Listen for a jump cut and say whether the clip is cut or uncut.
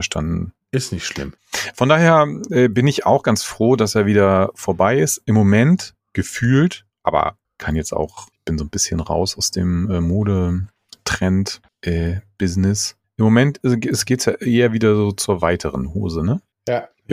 uncut